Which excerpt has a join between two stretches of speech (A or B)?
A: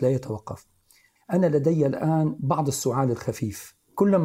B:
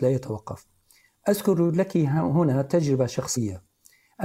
A